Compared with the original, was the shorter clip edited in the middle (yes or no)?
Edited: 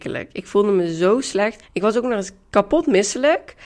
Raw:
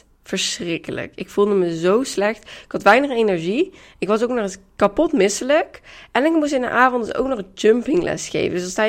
yes